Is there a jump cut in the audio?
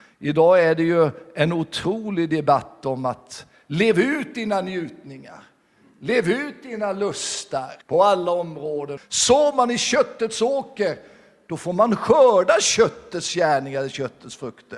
yes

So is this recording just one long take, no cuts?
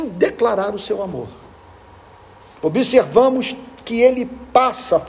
yes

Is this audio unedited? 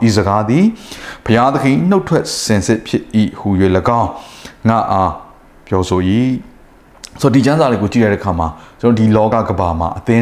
yes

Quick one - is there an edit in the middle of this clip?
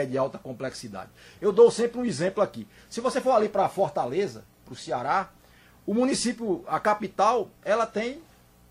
no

